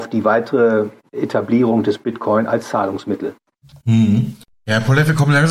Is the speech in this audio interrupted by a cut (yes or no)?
no